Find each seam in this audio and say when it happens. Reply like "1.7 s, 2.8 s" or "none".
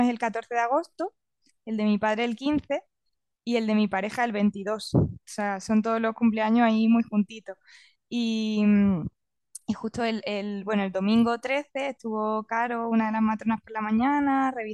none